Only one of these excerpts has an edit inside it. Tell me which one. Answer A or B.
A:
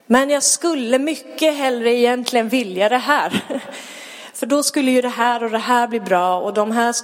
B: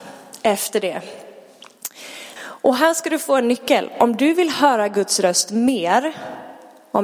B